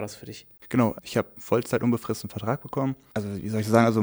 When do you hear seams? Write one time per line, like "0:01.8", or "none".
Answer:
0:01.0